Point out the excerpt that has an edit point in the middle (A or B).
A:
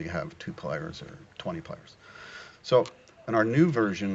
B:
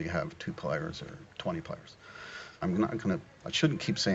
B